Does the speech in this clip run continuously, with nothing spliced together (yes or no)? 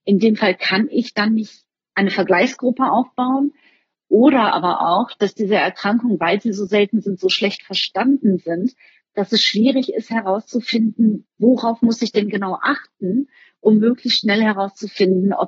yes